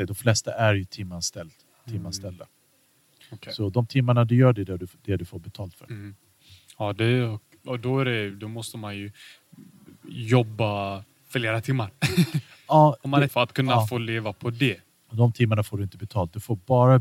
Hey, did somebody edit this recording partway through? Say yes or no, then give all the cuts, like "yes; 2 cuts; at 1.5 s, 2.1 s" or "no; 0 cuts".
yes; 2 cuts; at 13.3 s, 14.9 s